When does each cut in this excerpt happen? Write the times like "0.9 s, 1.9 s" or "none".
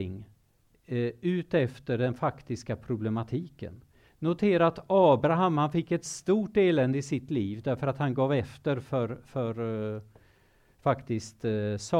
4.1 s